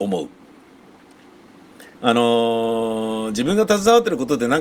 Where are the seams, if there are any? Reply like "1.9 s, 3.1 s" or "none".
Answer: none